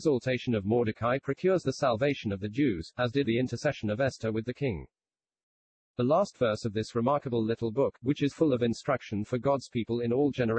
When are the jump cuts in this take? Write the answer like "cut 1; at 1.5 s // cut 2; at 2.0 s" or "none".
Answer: cut 1; at 3.2 s // cut 2; at 8.3 s